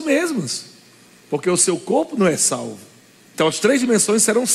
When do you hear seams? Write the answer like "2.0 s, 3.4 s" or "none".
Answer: 3.3 s